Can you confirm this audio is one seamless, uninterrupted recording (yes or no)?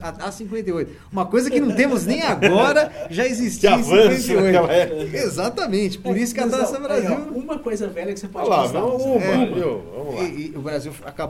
yes